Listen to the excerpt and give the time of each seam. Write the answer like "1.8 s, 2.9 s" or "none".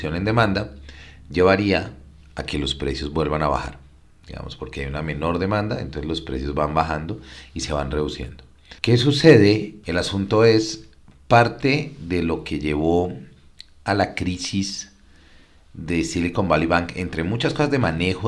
8.8 s, 9.8 s